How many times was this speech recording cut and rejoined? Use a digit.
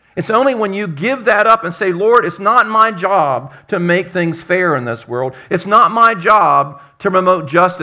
0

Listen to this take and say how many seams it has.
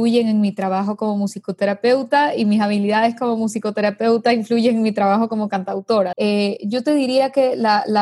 1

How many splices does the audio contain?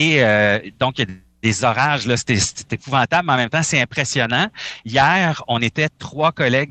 0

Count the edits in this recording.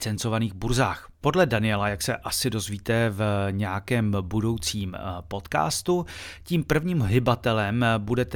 1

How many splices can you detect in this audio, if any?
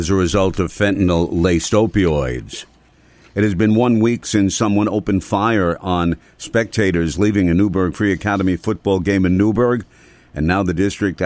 0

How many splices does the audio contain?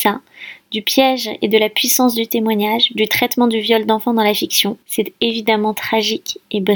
1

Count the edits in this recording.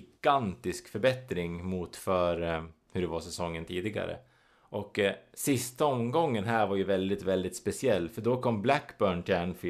0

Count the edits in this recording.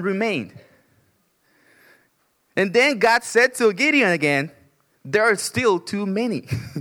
0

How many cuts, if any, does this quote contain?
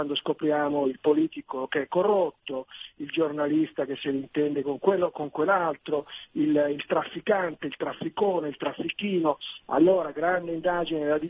1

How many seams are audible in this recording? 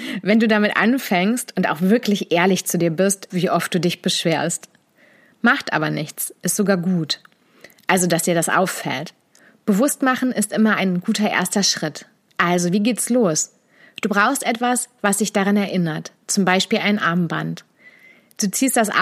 1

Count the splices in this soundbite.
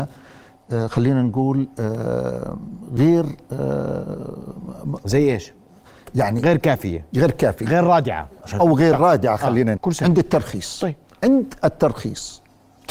1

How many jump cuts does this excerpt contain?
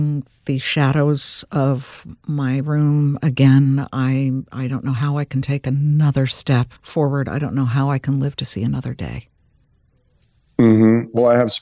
1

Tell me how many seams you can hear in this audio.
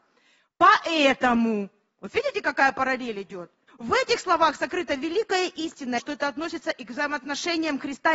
2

